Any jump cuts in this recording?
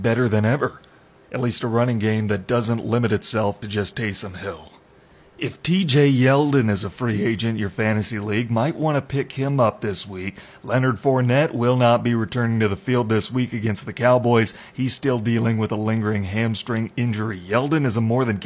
no; 0 cuts

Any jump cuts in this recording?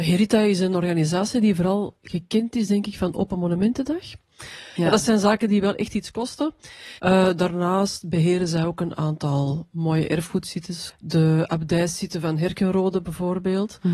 yes; 3 cuts; at 4.8 s, 7.0 s, 10.9 s

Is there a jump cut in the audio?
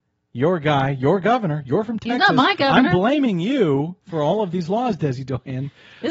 no; 0 cuts

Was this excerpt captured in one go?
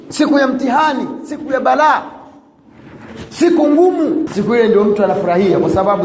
no; 1 cut; at 4.3 s

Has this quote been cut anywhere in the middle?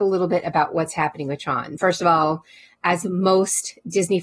no; 0 cuts

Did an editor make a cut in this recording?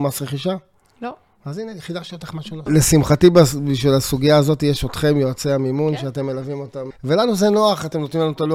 yes; 2 cuts; at 2.7 s, 6.9 s

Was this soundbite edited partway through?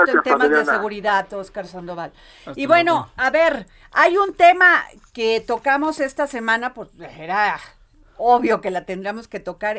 no; 0 cuts

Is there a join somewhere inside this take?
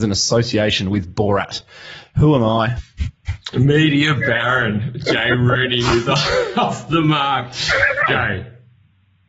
yes; 2 cuts; at 2.8 s, 8.1 s

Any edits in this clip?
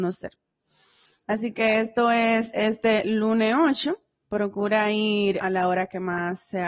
yes; 1 cut; at 5.4 s

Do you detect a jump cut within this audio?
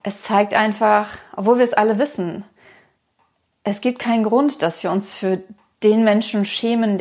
no; 0 cuts

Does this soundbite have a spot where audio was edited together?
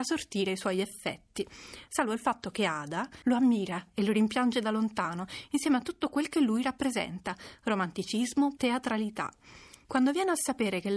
yes; 2 cuts; at 3.2 s, 8.6 s

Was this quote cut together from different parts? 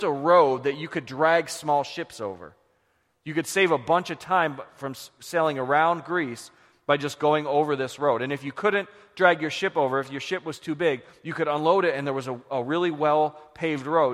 no; 0 cuts

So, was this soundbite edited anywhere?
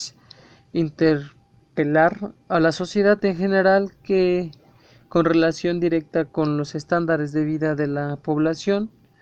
no; 0 cuts

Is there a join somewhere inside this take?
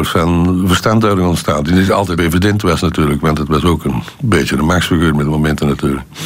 yes; 1 cut; at 2.2 s

